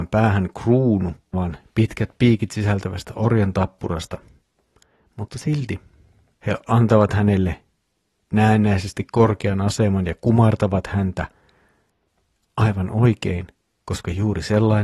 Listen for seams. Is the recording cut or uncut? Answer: cut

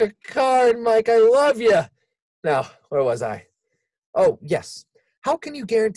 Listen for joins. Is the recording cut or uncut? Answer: uncut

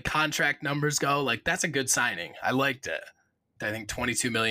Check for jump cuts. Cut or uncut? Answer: cut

